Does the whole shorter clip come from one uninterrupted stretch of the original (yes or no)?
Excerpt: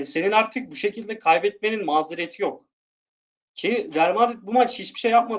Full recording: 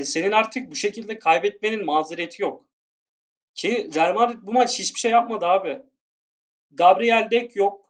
yes